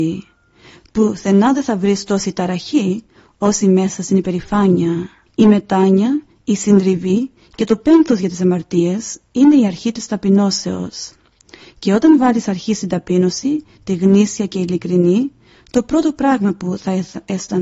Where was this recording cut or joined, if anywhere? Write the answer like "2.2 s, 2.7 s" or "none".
5.3 s